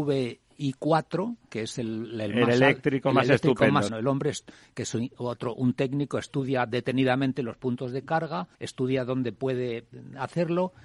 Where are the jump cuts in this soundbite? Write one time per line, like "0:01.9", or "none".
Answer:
0:03.9
0:08.5